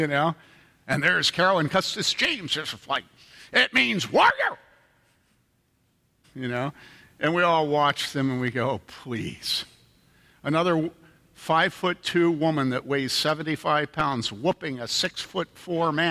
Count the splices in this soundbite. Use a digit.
1